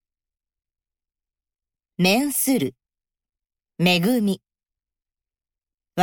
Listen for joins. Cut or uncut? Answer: cut